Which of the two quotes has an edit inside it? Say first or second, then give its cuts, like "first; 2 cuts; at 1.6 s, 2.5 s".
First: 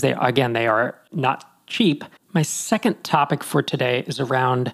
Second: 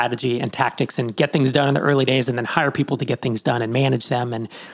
first; 1 cut; at 2.2 s